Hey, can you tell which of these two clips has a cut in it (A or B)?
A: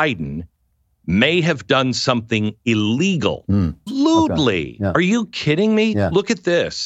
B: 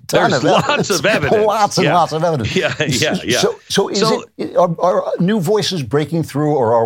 A